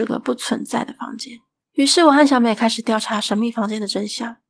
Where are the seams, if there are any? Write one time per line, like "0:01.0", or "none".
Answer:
0:01.6